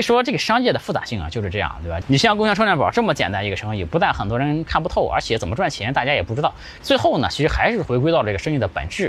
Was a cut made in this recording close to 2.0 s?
yes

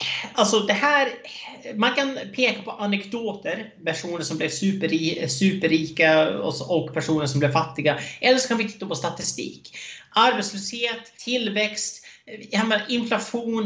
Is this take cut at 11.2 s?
yes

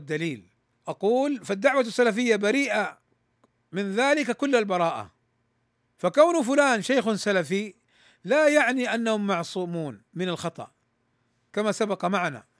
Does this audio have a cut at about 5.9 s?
no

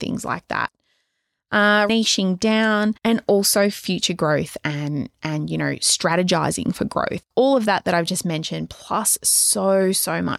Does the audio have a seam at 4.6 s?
no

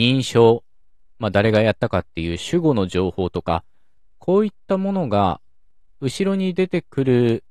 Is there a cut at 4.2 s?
no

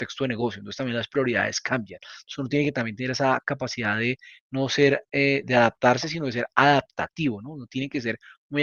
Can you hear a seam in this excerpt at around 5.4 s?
yes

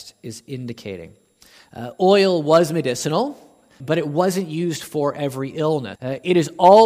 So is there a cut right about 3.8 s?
yes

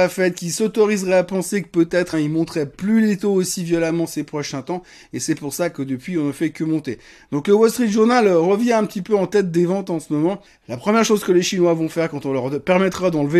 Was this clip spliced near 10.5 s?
yes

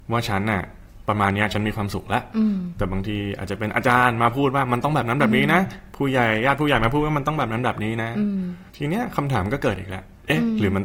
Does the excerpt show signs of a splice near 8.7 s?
yes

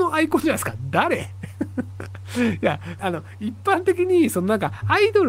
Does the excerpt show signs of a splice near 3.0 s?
yes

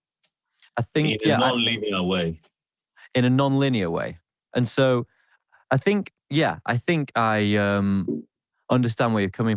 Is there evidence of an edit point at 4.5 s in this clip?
yes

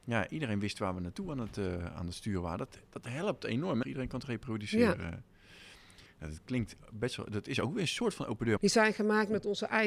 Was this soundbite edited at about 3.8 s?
yes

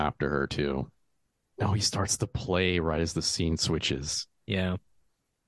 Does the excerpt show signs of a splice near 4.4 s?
no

